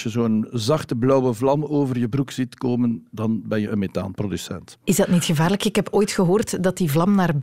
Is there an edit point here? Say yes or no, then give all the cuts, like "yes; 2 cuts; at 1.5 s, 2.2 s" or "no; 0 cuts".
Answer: no; 0 cuts